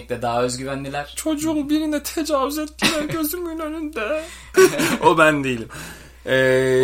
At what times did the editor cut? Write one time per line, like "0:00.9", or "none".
0:04.5